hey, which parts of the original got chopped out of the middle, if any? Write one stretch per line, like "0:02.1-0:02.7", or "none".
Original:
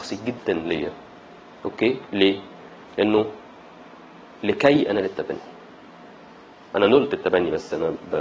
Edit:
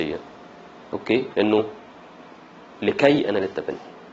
0:02.0-0:02.9